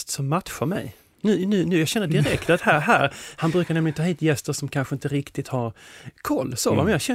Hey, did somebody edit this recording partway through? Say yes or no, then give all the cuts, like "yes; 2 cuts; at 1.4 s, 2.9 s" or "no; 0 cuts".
no; 0 cuts